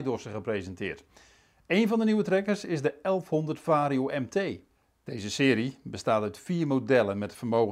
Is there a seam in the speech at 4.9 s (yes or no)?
no